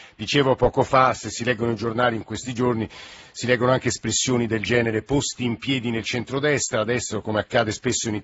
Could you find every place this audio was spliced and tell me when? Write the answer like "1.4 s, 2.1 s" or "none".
none